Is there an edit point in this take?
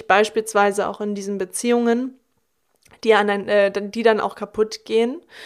no; 0 cuts

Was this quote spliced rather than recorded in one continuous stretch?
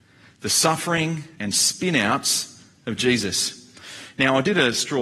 yes; 1 cut; at 1.4 s

